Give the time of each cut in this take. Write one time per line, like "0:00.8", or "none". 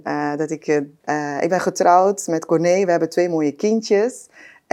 0:01.0